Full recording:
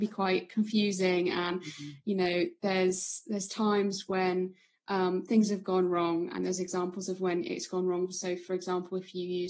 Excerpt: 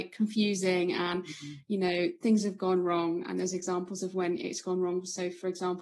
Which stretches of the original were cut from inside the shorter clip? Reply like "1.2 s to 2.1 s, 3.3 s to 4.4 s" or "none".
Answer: 2.6 s to 5.3 s